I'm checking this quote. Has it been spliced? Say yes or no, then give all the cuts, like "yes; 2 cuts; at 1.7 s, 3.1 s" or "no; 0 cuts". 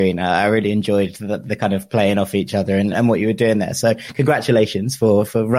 yes; 1 cut; at 2.9 s